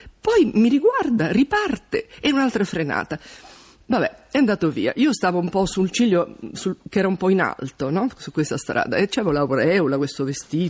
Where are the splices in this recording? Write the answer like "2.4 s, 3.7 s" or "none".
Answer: none